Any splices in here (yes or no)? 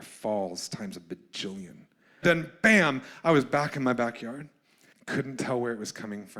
yes